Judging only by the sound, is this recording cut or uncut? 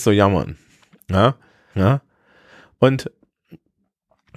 cut